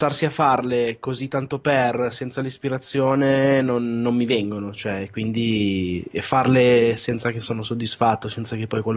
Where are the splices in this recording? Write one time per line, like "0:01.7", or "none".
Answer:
none

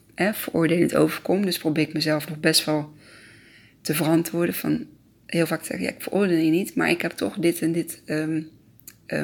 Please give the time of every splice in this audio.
none

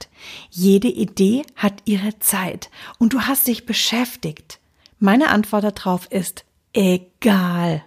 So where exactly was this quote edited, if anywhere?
0:04.8

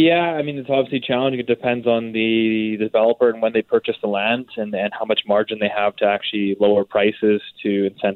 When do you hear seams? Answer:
none

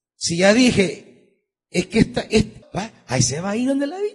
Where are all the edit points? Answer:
0:02.6

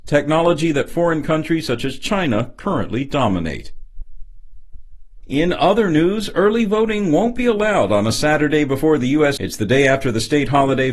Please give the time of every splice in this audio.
0:09.4

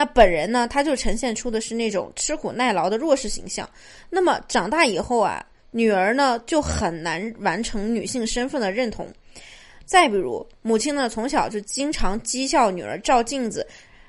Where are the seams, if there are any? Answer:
none

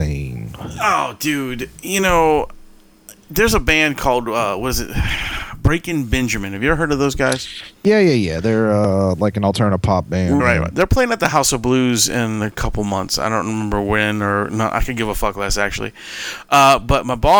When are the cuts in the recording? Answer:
0:10.4

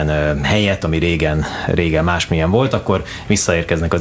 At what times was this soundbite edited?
none

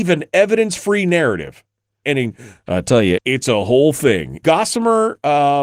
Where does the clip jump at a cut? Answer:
0:02.0
0:03.2
0:04.4

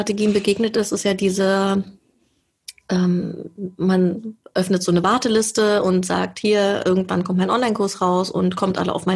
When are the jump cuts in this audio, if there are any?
none

